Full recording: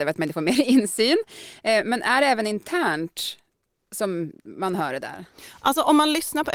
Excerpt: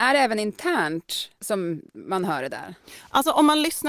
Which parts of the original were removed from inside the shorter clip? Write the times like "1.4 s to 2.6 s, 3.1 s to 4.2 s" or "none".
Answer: 3.4 s to 3.9 s